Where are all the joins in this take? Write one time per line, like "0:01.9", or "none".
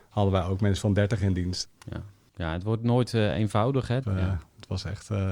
0:01.6
0:04.0